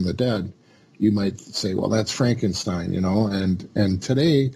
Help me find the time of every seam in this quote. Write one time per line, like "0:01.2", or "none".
none